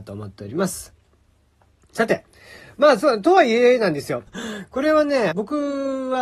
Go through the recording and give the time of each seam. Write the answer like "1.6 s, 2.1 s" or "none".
4.3 s, 5.3 s